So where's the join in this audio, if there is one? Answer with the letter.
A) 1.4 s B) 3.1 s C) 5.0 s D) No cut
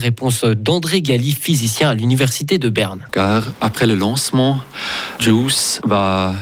B